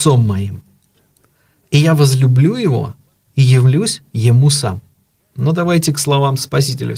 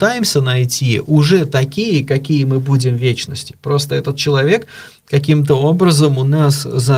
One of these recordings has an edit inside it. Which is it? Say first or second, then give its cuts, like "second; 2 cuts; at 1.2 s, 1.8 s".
first; 1 cut; at 5.3 s